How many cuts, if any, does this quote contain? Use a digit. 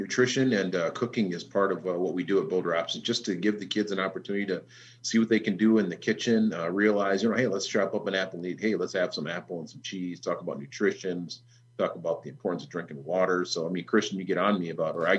0